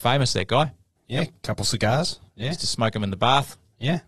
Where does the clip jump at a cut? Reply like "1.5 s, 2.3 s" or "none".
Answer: 1.0 s, 2.3 s